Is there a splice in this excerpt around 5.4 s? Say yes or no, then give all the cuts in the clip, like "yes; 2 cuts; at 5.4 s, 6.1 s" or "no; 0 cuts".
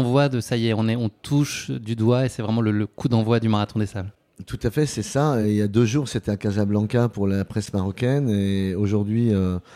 no; 0 cuts